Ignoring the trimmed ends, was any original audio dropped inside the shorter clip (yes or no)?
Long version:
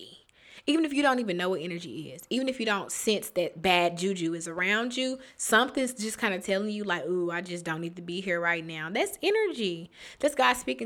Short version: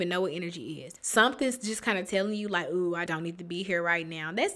yes